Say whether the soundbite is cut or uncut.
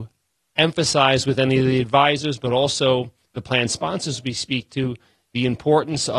uncut